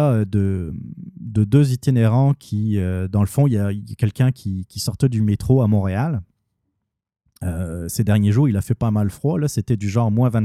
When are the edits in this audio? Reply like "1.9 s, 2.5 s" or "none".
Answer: none